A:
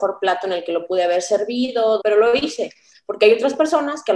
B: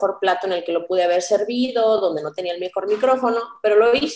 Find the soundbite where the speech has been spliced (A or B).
A